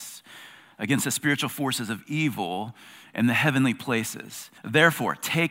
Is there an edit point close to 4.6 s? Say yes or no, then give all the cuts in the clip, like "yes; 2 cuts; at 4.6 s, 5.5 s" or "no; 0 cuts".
yes; 1 cut; at 4.6 s